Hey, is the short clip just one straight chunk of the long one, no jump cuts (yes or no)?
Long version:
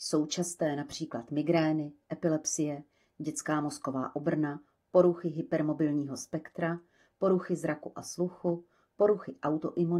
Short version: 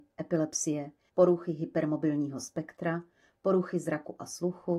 no